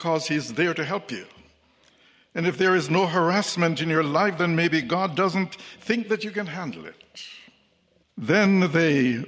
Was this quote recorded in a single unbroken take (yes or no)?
no